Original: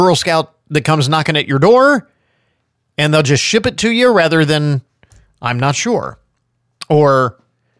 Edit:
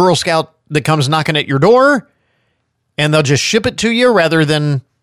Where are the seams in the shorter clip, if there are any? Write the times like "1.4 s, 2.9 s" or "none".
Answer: none